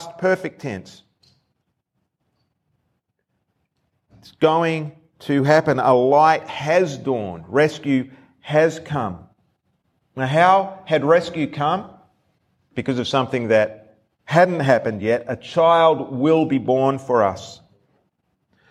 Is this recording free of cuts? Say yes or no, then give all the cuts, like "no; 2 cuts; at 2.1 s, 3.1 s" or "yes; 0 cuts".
yes; 0 cuts